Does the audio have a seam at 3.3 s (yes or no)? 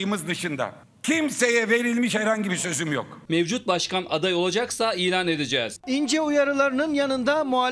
yes